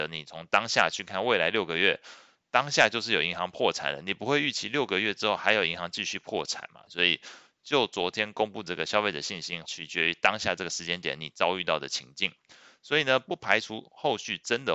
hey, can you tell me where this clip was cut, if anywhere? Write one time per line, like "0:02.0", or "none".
0:06.9
0:09.6